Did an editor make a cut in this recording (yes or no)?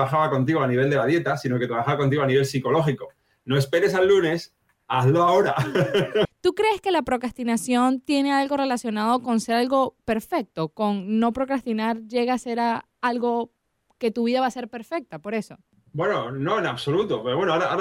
yes